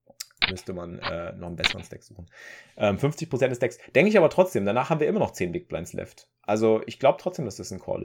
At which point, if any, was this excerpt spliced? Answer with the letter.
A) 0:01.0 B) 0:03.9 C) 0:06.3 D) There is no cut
D